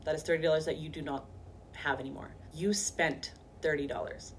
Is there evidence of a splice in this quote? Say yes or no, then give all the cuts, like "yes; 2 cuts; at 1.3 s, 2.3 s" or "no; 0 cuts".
yes; 1 cut; at 2.5 s